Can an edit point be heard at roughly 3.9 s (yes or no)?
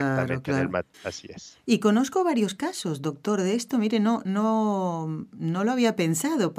no